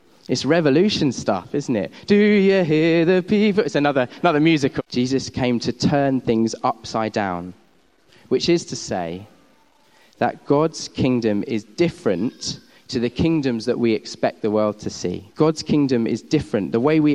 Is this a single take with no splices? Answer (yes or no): no